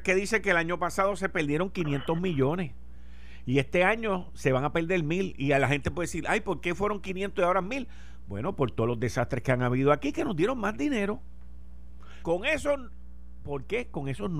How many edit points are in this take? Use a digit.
1